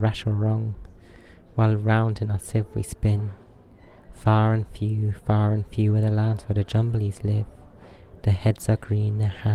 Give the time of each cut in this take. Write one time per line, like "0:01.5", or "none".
none